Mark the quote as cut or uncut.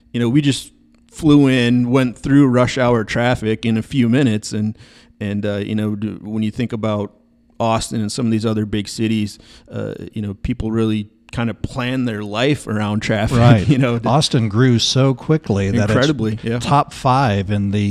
uncut